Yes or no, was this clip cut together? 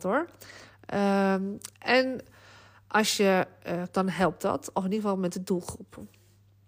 yes